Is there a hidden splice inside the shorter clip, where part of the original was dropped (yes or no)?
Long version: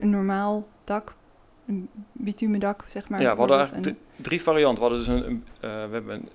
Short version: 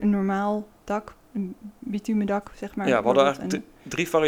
yes